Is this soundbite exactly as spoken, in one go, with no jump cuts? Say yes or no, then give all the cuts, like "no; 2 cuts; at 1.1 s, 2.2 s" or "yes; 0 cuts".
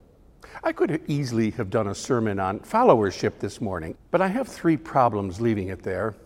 no; 1 cut; at 3.9 s